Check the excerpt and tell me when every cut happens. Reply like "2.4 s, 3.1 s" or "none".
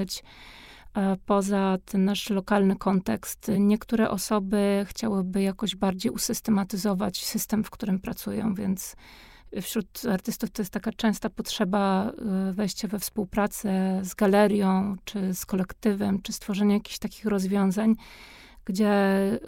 1.8 s, 3.6 s